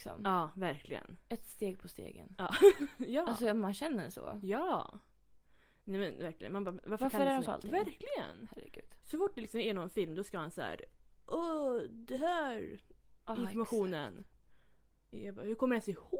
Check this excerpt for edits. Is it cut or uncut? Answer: cut